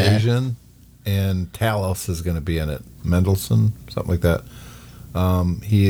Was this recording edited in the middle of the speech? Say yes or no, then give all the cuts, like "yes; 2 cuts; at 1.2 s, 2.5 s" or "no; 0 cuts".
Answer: yes; 1 cut; at 2.9 s